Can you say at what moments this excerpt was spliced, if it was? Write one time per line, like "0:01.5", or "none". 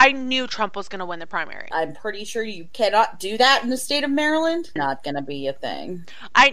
0:01.7
0:04.8